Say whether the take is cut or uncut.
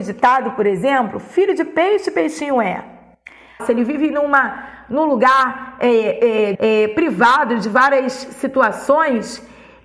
cut